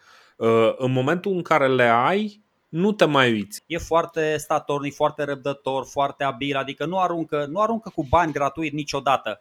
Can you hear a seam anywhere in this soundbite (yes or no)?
yes